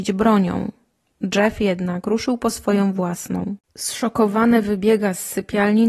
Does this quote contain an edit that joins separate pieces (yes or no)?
yes